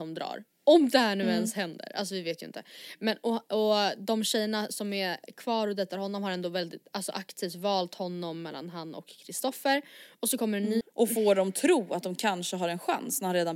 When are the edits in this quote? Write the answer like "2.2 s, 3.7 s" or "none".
10.8 s